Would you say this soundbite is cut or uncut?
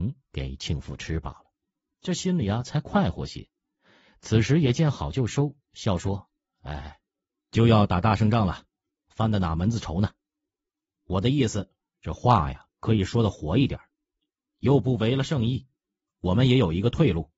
uncut